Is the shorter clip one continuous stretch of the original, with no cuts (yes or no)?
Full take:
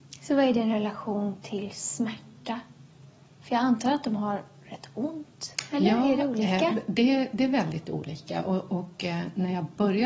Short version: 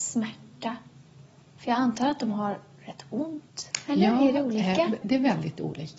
no